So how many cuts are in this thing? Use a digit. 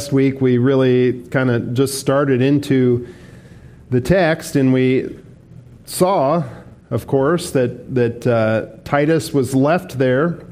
0